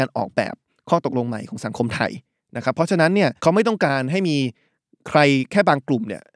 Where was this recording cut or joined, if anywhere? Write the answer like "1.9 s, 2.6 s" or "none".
3.4 s

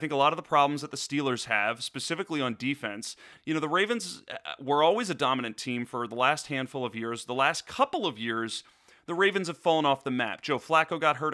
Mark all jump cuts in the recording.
3.4 s

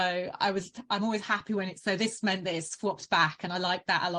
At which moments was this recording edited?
none

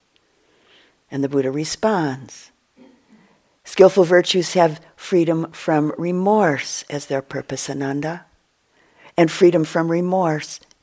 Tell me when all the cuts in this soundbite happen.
none

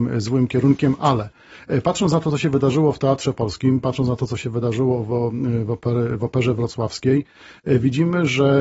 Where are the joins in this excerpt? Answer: none

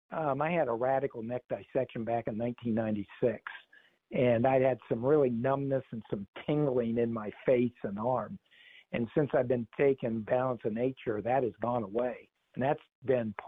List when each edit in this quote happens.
none

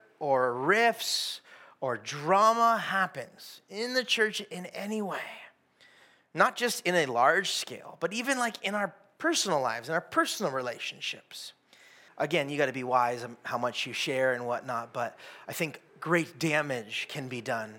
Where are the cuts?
12.1 s, 15.9 s

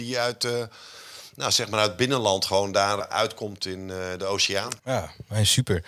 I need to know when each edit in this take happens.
3.0 s, 4.8 s

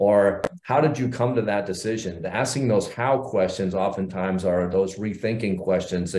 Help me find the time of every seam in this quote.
none

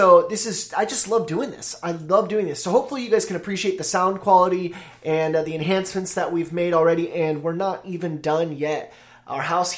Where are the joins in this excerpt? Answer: none

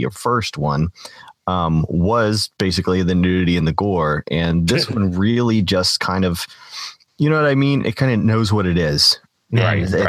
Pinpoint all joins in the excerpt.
none

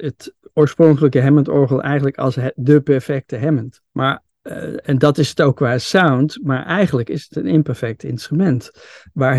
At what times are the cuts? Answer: 3.9 s

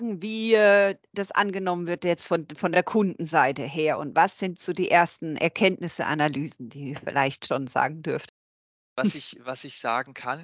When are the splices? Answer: none

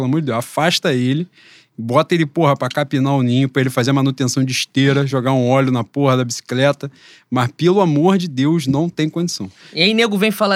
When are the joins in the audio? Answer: none

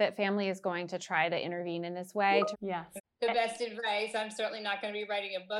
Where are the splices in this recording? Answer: 2.5 s

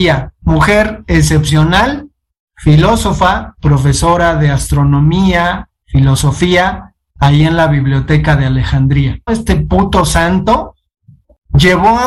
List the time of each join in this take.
9.3 s

